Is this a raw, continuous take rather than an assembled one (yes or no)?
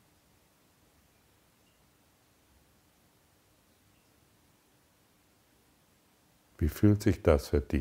yes